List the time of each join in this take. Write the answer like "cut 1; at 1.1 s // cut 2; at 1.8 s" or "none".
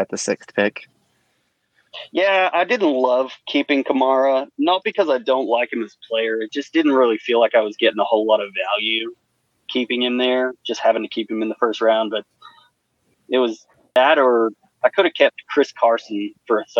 none